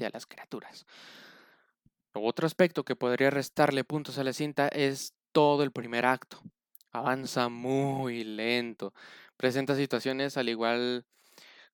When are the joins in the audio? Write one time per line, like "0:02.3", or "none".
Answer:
none